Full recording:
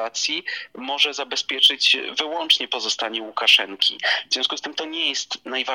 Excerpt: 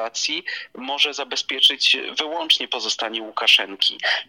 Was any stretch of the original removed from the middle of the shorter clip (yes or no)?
no